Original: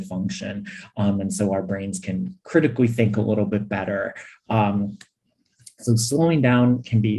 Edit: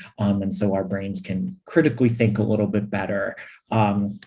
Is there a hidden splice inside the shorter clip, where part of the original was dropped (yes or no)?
no